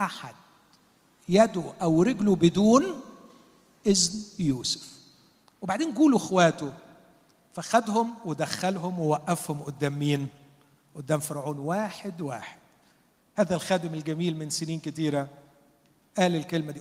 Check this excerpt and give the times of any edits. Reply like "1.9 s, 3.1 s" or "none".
none